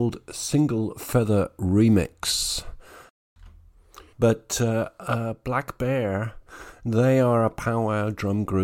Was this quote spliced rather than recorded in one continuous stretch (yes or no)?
yes